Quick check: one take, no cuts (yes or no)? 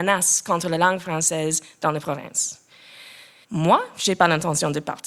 no